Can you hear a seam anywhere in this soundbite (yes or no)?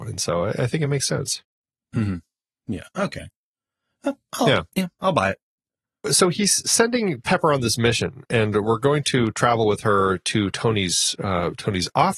no